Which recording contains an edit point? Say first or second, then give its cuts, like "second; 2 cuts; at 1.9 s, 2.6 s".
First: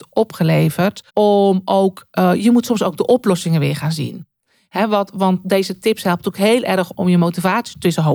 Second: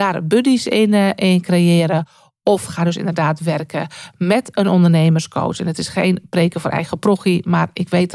first; 2 cuts; at 1.1 s, 6.9 s